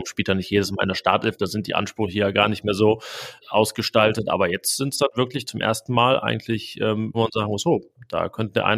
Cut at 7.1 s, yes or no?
yes